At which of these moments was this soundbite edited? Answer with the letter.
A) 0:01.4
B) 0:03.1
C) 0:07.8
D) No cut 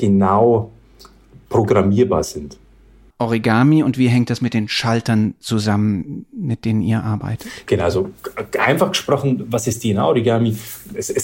B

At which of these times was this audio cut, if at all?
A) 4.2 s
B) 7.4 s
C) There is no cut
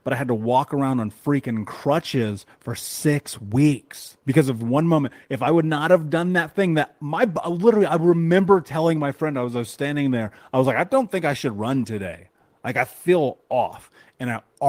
A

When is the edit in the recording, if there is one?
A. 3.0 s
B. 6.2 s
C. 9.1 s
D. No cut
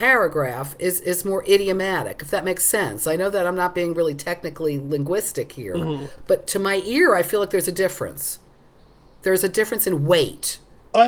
D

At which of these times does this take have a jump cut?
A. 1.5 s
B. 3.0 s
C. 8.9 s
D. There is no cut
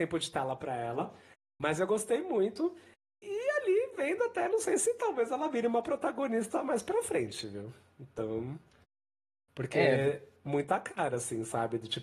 D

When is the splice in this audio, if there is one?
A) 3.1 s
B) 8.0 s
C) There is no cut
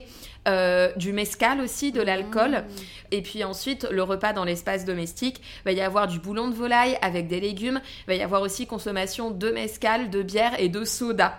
A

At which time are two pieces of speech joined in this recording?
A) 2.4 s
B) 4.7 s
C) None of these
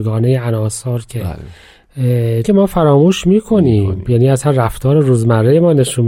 A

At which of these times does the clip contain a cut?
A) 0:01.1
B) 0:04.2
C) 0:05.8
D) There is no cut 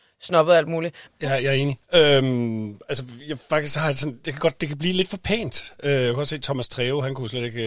A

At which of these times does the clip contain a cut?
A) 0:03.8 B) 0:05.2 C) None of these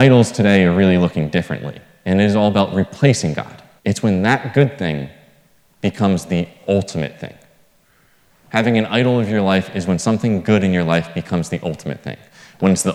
A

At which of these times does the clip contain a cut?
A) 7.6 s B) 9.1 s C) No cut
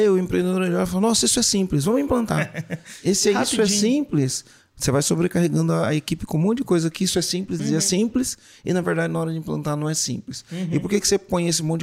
A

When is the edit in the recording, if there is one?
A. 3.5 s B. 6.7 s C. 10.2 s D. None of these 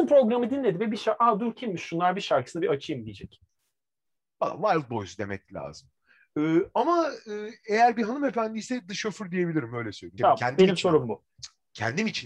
C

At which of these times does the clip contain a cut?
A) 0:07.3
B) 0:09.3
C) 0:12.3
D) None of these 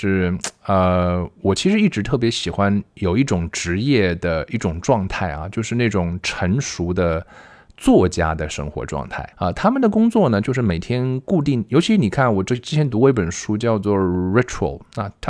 B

